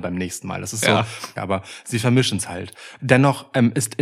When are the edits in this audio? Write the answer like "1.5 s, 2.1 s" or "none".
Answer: 1.4 s, 3.0 s